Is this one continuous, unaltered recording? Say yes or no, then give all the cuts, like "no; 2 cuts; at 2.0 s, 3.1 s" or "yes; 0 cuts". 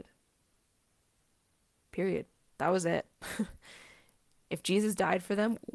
yes; 0 cuts